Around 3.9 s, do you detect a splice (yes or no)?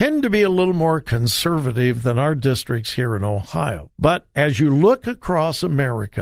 yes